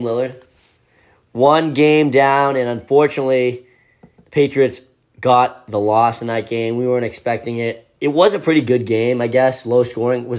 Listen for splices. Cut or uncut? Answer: uncut